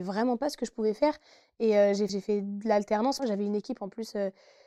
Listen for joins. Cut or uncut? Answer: cut